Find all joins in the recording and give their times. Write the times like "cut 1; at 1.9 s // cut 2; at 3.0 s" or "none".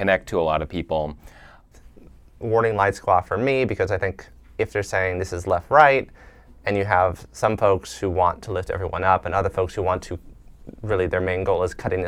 cut 1; at 1.7 s

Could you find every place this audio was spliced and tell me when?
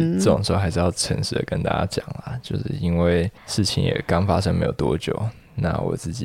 cut 1; at 3.4 s

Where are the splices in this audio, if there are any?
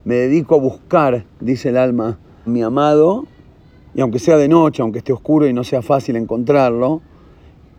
cut 1; at 2.5 s

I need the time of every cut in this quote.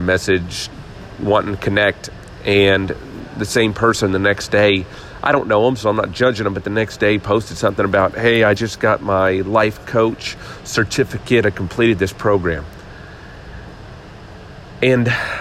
none

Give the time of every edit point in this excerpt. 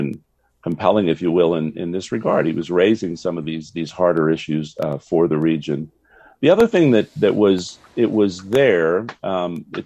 none

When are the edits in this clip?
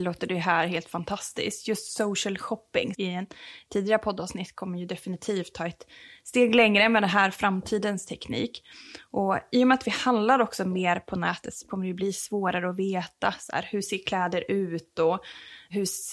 cut 1; at 2.9 s

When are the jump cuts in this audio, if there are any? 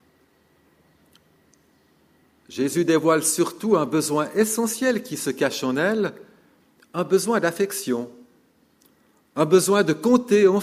none

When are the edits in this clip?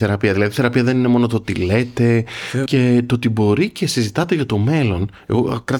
cut 1; at 2.7 s

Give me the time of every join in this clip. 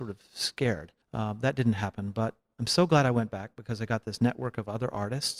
cut 1; at 1.0 s

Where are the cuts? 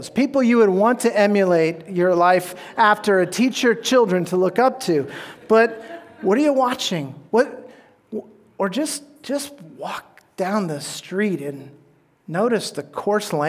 none

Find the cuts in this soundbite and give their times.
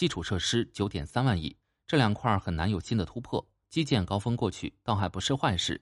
cut 1; at 3.6 s

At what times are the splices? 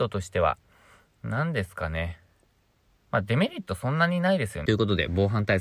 cut 1; at 4.7 s

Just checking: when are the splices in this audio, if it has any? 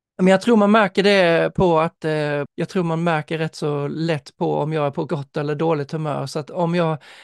cut 1; at 2.5 s

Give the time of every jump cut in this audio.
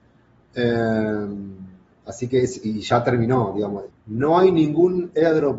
cut 1; at 3.9 s

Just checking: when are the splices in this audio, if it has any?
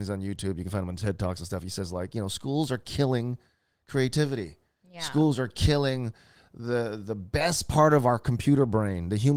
none

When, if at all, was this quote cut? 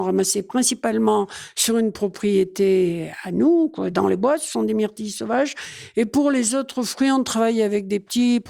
none

